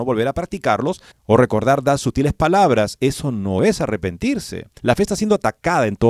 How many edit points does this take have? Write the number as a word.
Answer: two